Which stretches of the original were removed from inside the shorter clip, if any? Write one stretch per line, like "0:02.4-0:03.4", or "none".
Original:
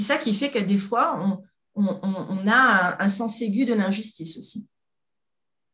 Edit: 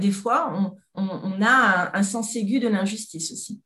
0:01.6-0:02.0